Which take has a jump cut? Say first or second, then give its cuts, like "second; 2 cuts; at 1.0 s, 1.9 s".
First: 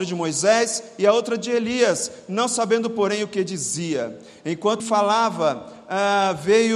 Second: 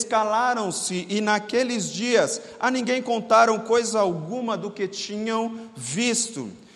first; 1 cut; at 4.8 s